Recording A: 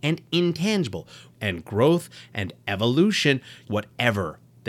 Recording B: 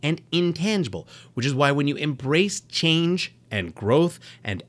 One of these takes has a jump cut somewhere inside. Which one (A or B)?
A